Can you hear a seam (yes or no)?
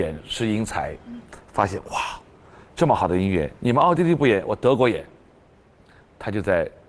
no